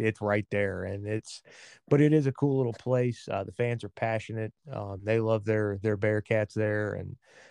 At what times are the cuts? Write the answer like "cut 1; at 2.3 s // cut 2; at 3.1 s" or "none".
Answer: none